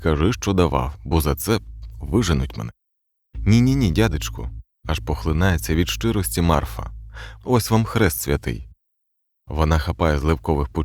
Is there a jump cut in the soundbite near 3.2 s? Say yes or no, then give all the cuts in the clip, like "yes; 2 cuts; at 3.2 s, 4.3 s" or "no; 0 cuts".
no; 0 cuts